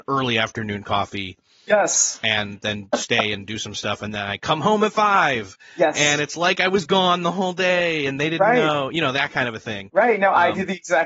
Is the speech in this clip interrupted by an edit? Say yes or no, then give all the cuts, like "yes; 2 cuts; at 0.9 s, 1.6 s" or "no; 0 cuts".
no; 0 cuts